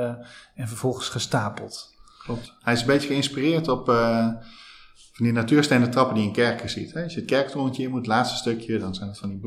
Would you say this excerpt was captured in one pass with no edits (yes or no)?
yes